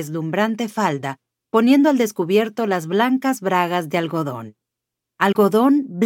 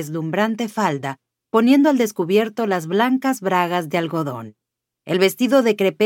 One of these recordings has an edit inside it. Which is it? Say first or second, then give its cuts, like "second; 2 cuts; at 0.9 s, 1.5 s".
second; 1 cut; at 5.0 s